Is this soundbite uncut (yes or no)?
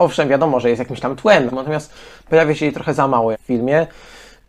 no